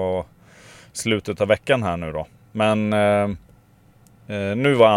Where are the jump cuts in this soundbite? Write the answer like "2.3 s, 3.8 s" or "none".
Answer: none